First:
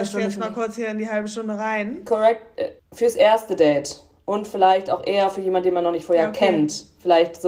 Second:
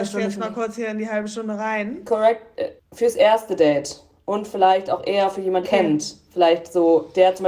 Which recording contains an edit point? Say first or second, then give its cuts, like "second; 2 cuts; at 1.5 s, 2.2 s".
second; 1 cut; at 5.6 s